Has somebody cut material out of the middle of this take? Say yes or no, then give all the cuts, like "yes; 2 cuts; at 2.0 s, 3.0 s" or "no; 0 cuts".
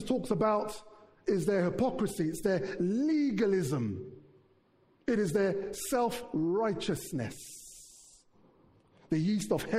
no; 0 cuts